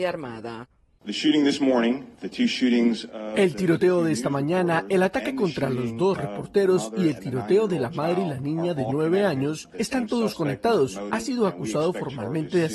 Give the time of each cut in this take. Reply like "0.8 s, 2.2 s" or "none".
11.1 s